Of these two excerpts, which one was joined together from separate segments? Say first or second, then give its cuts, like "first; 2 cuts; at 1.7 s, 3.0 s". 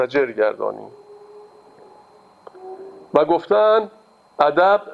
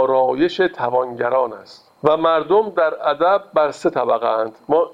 second; 1 cut; at 1.9 s